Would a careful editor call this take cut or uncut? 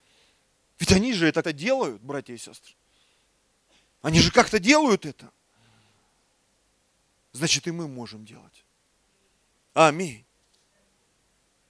cut